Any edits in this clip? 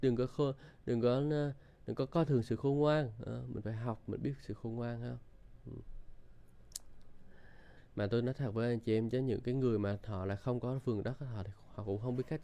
yes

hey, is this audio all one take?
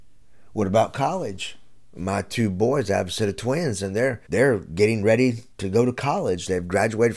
no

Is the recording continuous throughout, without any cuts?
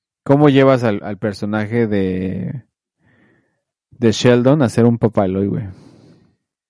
yes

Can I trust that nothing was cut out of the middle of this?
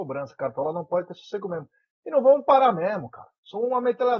yes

